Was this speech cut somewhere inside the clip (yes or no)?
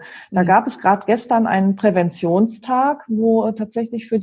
no